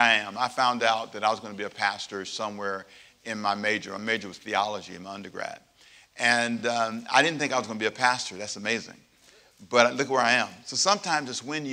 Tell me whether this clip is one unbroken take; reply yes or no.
yes